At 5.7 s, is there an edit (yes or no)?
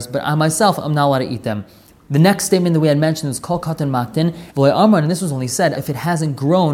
yes